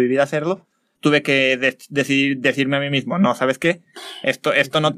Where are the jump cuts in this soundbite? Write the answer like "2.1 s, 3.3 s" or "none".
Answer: 1.0 s